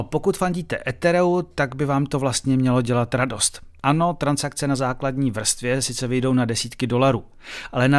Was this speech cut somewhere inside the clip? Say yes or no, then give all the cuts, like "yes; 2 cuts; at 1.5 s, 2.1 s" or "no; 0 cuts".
no; 0 cuts